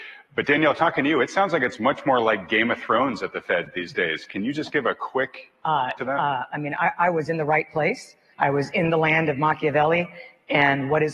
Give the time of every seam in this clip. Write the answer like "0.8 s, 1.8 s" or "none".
6.0 s, 8.3 s